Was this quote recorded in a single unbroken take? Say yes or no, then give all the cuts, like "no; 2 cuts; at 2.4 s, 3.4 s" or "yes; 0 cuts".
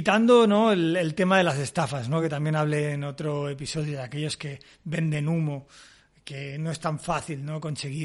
yes; 0 cuts